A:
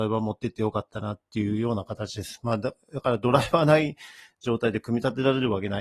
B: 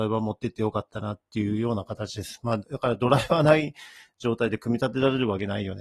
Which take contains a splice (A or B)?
B